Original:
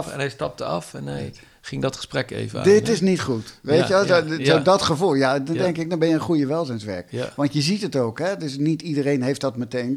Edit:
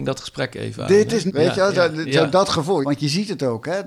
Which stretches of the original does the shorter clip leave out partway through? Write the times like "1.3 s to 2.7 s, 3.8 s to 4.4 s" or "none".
3.0 s to 3.6 s, 5.1 s to 7.3 s